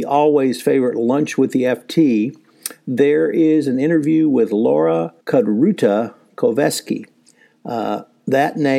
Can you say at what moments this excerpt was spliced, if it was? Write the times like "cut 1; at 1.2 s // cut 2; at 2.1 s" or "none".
cut 1; at 5.2 s